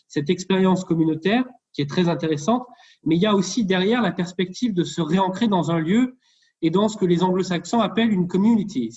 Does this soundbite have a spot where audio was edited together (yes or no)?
no